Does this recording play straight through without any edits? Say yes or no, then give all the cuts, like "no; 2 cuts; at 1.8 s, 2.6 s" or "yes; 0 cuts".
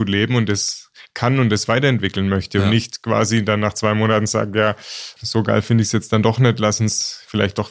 no; 1 cut; at 5.2 s